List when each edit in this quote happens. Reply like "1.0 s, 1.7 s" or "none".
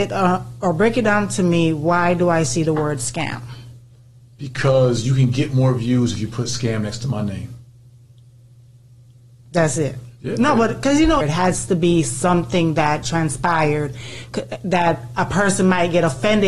10.2 s, 11.2 s